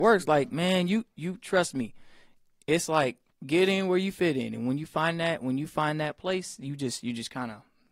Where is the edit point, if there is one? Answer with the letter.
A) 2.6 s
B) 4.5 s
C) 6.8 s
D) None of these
D